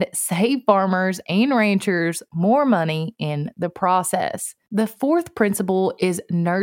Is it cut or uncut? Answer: uncut